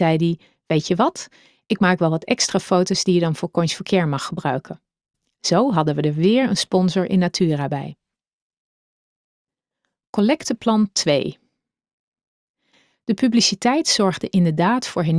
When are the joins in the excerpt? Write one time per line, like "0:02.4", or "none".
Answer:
none